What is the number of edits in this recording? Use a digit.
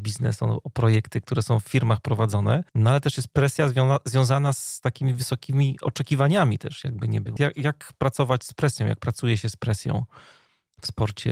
2